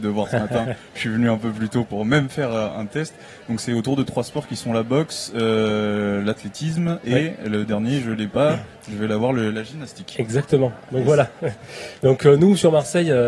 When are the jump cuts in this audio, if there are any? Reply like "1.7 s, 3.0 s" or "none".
none